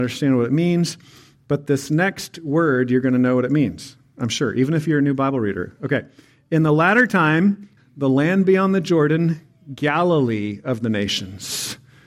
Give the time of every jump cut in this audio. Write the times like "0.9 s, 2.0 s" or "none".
7.8 s